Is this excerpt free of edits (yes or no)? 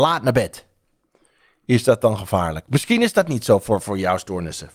no